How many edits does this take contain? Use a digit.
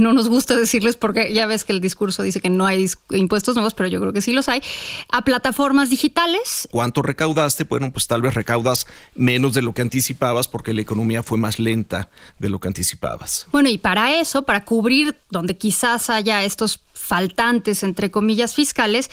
1